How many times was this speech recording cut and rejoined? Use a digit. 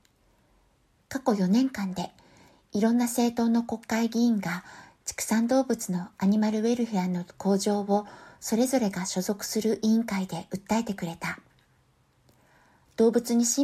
0